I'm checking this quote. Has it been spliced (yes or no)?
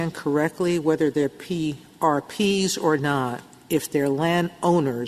no